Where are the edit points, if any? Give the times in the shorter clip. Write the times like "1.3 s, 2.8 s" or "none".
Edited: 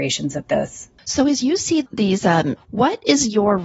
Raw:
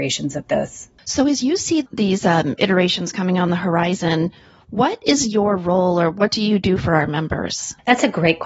2.6 s